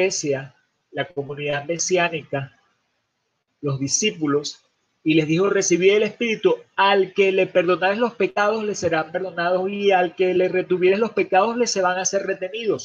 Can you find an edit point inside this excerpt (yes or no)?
no